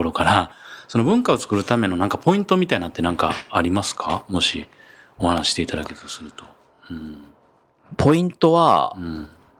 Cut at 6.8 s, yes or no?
no